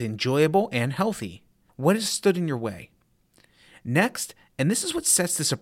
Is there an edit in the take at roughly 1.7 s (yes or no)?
yes